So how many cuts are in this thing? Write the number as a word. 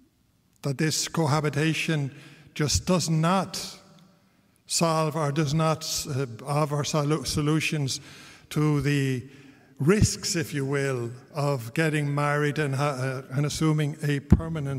zero